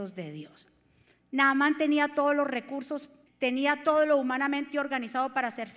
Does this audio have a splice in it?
yes; 1 cut; at 3.3 s

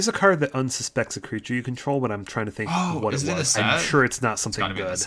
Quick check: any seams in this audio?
no; 0 cuts

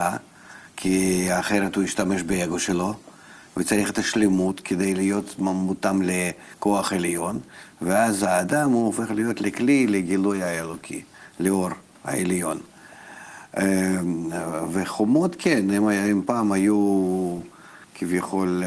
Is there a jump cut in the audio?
no; 0 cuts

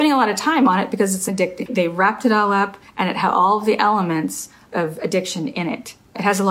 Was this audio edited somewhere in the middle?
yes; 2 cuts; at 1.7 s, 2.9 s

